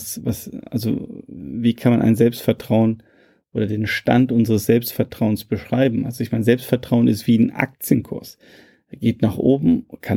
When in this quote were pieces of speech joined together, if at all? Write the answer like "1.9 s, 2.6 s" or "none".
none